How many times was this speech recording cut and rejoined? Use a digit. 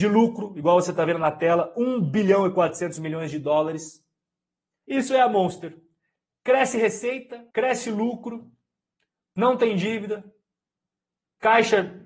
2